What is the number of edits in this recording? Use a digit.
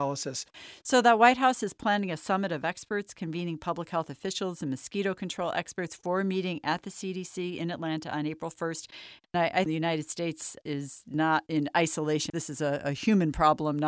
2